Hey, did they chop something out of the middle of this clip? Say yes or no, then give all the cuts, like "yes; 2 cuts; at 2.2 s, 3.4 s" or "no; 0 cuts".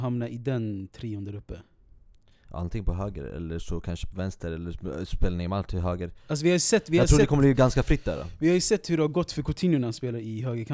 no; 0 cuts